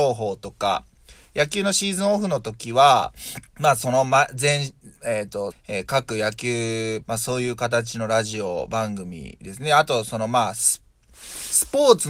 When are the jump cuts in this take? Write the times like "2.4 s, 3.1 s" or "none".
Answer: 3.5 s, 5.5 s, 7.0 s